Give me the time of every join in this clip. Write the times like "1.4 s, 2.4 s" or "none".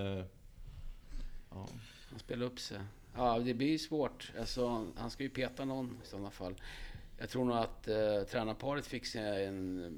none